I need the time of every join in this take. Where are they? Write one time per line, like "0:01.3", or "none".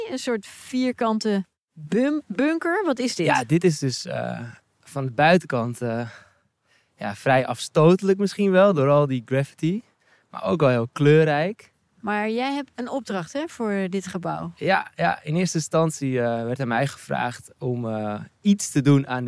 0:12.8